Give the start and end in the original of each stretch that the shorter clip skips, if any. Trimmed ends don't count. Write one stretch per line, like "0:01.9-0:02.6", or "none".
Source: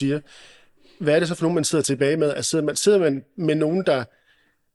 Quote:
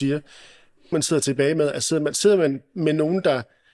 0:00.9-0:01.5